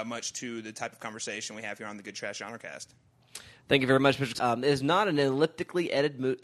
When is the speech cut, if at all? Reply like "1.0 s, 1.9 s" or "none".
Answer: 4.3 s